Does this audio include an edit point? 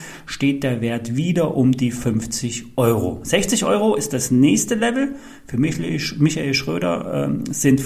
no; 0 cuts

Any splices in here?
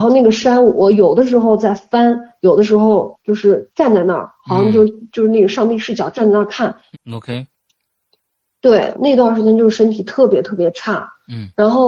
yes; 2 cuts; at 6.9 s, 8.9 s

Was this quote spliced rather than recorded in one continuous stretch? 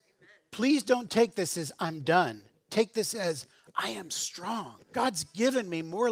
yes; 1 cut; at 4.8 s

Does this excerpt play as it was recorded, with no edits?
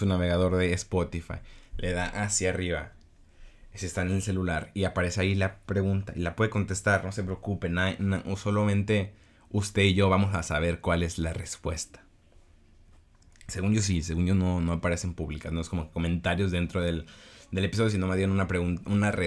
yes; 0 cuts

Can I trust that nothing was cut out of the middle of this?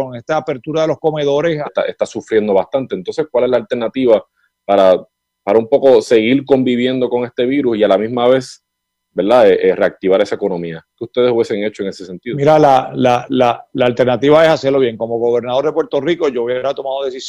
no; 1 cut; at 1.6 s

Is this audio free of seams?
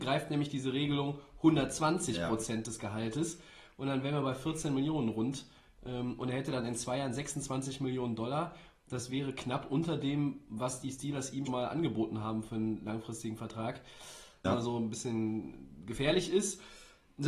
no; 2 cuts; at 11.5 s, 14.4 s

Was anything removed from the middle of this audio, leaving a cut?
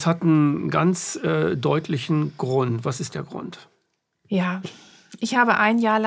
yes; 1 cut; at 4.6 s

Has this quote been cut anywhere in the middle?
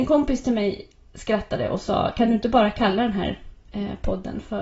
no; 0 cuts

